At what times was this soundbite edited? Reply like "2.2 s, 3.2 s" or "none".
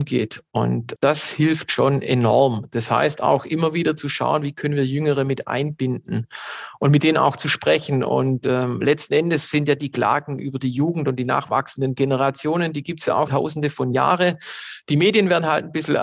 1.0 s, 13.3 s